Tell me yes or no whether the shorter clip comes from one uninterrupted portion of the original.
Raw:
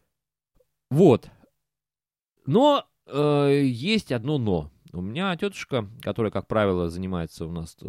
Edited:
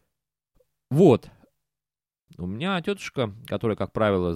no